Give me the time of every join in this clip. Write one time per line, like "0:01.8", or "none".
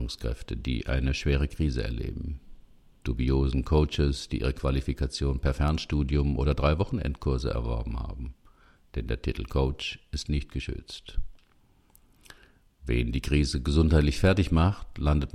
0:03.0